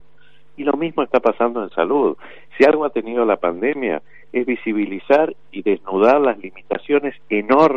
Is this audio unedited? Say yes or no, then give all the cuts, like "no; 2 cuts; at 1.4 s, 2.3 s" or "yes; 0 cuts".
yes; 0 cuts